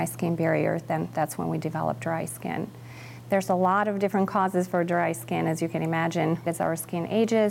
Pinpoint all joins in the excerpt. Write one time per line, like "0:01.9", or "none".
0:06.5